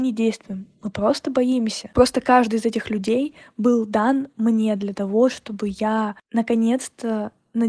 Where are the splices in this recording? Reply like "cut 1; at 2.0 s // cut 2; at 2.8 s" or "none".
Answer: cut 1; at 1.9 s